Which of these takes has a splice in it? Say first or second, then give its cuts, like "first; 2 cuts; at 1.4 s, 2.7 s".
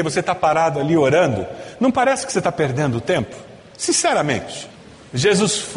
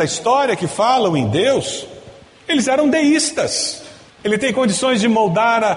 second; 1 cut; at 4.2 s